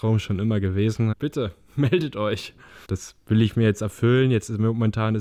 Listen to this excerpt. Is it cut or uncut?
cut